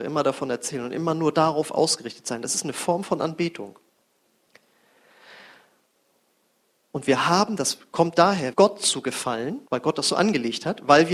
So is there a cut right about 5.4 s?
no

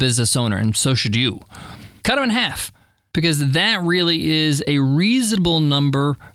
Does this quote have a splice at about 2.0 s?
yes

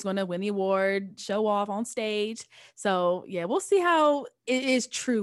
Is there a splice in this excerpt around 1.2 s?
yes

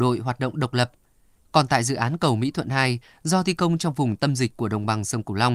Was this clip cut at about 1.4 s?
yes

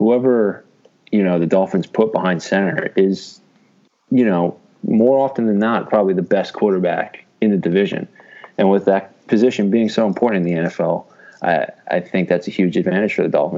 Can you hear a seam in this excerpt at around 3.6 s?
no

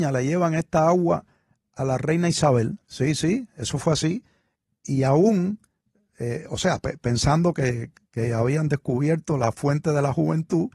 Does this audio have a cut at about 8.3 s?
no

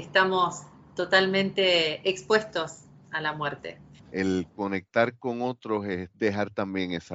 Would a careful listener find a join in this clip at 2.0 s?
no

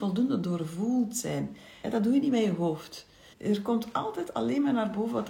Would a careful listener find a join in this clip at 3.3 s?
yes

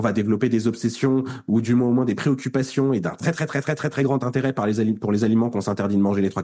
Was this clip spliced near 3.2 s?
no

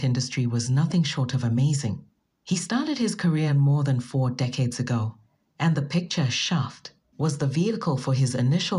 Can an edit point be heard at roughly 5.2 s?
no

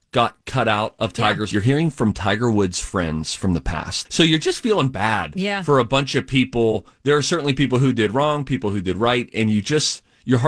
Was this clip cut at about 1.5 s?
yes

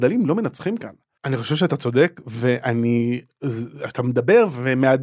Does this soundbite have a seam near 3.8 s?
no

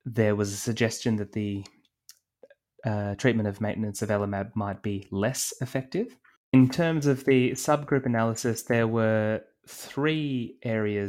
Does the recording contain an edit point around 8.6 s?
no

